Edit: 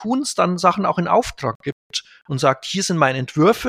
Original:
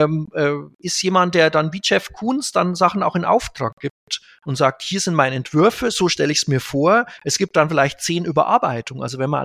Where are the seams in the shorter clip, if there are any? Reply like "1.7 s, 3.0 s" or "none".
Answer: none